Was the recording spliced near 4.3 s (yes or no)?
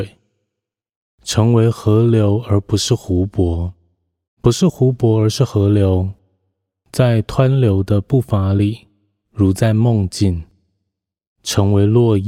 yes